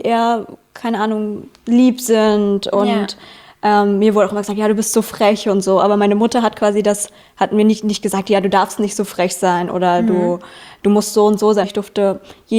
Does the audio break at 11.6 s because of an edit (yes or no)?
yes